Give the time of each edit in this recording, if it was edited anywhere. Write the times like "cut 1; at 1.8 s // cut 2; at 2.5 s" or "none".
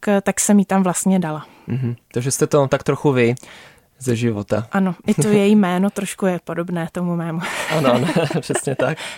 none